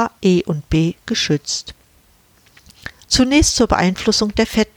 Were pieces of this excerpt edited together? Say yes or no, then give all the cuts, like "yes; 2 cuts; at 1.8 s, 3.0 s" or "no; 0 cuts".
yes; 1 cut; at 3.0 s